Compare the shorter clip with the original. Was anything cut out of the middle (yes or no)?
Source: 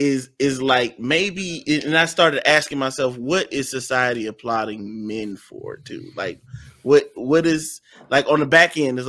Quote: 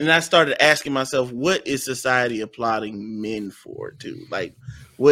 no